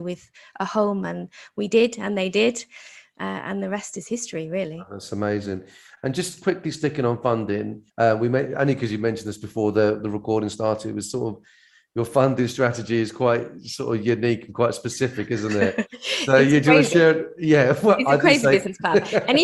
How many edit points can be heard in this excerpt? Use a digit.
1